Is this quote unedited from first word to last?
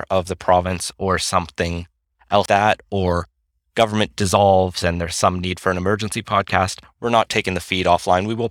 no; 1 cut; at 2.5 s

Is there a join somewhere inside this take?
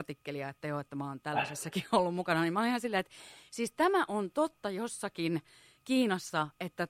no; 0 cuts

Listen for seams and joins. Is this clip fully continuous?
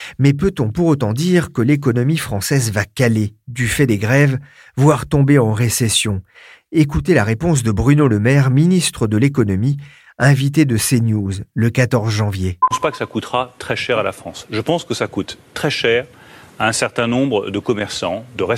yes; 0 cuts

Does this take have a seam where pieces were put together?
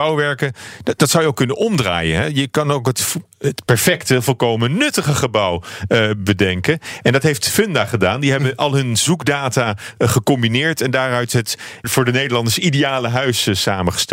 yes; 1 cut; at 11.8 s

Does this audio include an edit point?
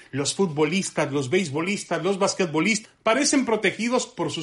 yes; 1 cut; at 2.8 s

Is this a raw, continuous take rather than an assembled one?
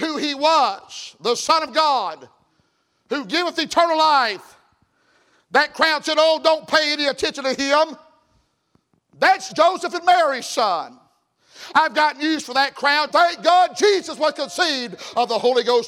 no; 2 cuts; at 9.5 s, 13.1 s

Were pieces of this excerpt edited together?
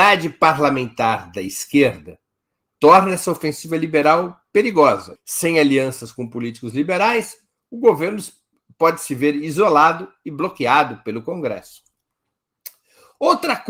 yes; 1 cut; at 5.2 s

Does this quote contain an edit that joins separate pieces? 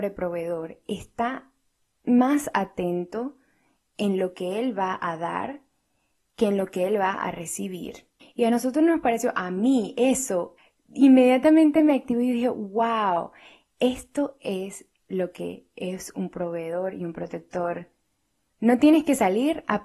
yes; 2 cuts; at 8.2 s, 18.5 s

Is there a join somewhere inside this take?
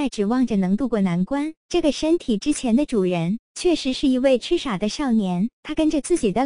yes; 1 cut; at 1.6 s

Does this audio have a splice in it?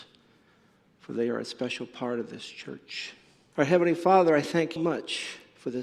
yes; 2 cuts; at 3.5 s, 4.8 s

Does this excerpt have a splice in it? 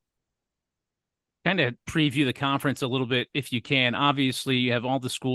no; 0 cuts

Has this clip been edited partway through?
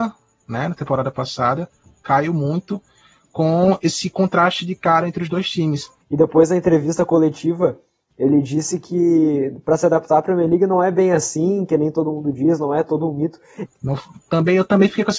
yes; 2 cuts; at 6.0 s, 13.7 s

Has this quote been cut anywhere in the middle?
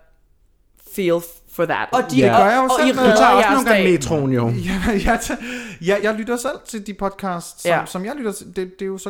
yes; 2 cuts; at 1.9 s, 6.0 s

